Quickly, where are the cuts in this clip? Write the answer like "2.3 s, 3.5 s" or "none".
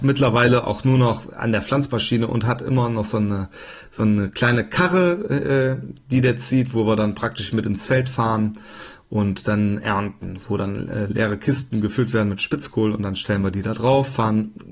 none